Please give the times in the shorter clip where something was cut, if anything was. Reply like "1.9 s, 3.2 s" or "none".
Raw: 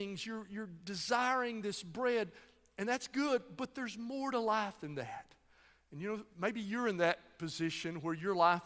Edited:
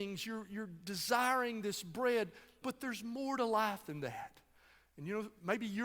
2.6 s